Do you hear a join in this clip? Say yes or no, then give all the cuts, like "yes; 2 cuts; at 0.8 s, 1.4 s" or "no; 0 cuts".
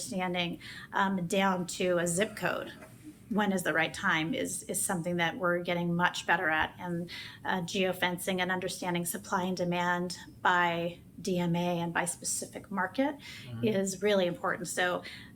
no; 0 cuts